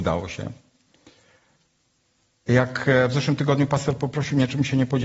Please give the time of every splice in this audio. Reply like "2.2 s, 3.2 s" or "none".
none